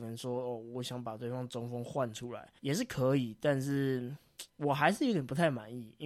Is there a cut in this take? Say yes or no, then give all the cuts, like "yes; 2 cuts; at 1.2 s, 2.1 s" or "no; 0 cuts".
yes; 2 cuts; at 2.6 s, 4.5 s